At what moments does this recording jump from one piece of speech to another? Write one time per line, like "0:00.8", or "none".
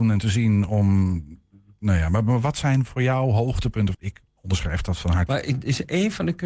0:03.9
0:05.3